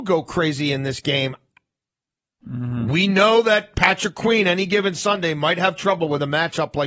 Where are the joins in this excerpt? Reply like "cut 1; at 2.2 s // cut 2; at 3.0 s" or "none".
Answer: cut 1; at 2.4 s